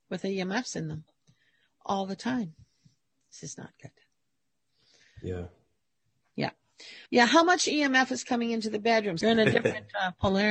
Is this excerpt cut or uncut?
cut